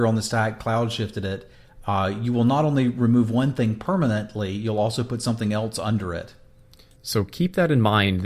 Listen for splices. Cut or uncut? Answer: uncut